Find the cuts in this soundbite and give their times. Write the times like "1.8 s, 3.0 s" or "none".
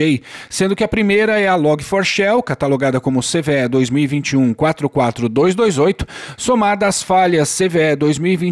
none